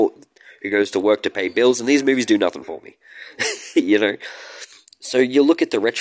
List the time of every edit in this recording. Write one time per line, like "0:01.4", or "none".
none